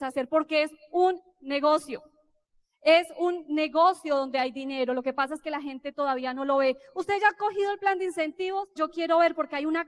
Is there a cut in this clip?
yes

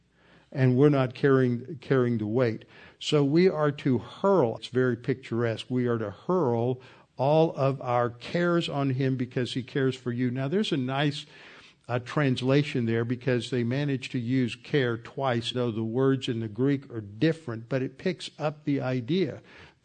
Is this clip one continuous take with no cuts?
no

